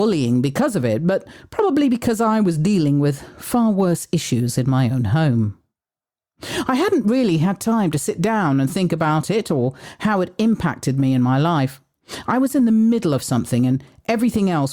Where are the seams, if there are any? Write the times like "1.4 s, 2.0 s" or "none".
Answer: none